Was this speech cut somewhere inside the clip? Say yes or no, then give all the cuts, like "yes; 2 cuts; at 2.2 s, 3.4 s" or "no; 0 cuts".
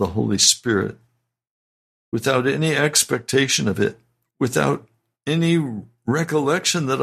yes; 1 cut; at 4.3 s